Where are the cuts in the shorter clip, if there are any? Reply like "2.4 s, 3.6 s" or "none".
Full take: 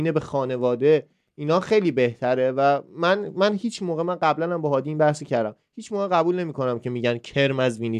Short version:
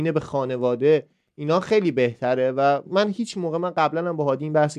2.9 s